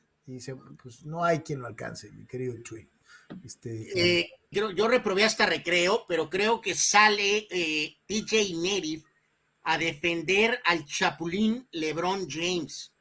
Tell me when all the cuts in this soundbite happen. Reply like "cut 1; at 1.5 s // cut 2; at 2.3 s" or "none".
cut 1; at 4.5 s